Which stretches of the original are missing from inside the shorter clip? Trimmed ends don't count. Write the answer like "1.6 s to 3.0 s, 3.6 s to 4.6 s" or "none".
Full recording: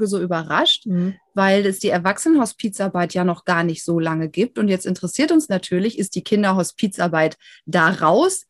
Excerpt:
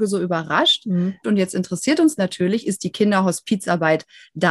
1.2 s to 4.5 s